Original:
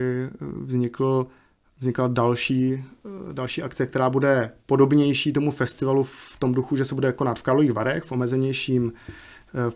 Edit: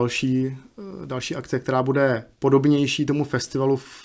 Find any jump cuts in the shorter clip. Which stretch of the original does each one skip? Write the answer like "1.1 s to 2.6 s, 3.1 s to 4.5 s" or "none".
none